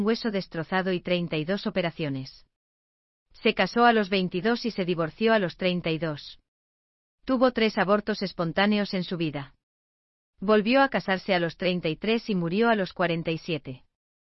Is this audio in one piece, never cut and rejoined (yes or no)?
yes